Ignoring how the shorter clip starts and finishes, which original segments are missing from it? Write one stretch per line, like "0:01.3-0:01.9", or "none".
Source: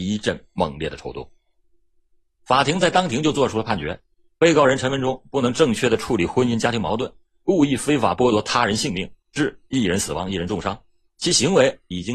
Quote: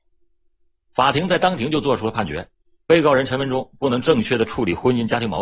none